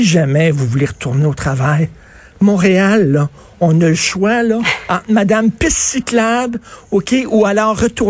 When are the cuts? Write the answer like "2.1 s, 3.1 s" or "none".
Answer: none